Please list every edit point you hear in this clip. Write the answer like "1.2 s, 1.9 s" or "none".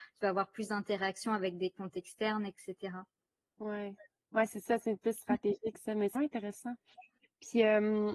6.1 s